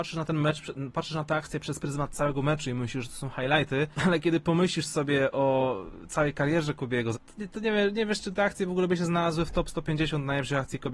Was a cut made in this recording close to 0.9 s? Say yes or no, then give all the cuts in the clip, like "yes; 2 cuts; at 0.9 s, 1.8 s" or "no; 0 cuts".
no; 2 cuts; at 3.9 s, 7.1 s